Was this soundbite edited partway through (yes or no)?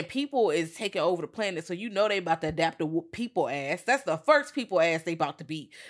no